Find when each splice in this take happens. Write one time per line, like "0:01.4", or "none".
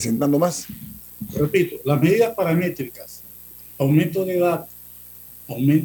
none